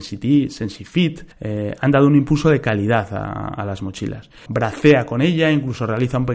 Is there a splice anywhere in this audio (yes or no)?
yes